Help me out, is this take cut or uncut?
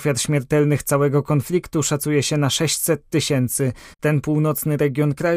cut